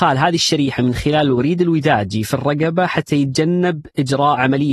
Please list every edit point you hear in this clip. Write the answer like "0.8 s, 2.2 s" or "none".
none